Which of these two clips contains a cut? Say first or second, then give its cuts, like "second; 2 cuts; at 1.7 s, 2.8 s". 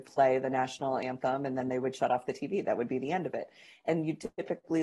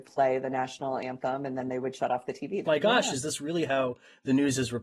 second; 1 cut; at 2.6 s